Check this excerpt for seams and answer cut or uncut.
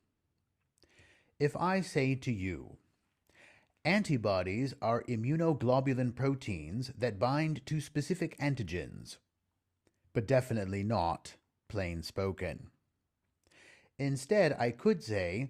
cut